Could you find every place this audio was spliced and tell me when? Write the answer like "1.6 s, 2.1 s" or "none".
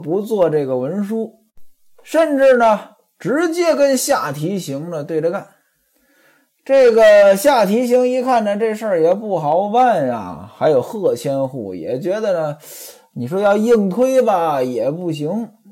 none